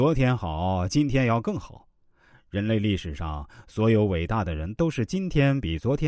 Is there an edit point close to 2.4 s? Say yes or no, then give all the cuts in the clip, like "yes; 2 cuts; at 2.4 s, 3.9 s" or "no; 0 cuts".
no; 0 cuts